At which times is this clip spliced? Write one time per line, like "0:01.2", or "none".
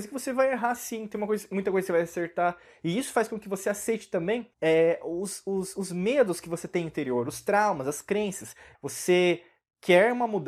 0:04.5
0:08.7